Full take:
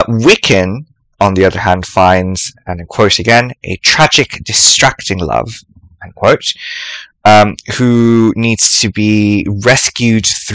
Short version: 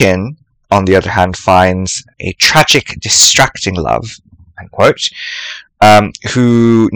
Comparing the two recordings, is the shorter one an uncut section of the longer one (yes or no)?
no